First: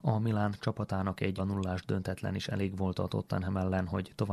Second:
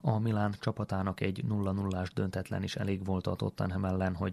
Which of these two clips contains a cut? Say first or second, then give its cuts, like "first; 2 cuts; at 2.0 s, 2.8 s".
first; 1 cut; at 1.4 s